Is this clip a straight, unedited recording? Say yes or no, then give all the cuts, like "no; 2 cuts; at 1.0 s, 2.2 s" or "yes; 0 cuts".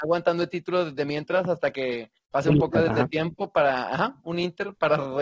yes; 0 cuts